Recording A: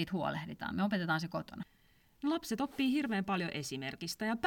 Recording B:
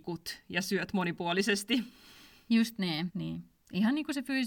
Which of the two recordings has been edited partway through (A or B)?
B